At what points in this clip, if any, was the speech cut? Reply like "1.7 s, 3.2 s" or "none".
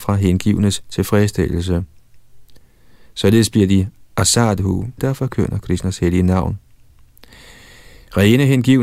5.0 s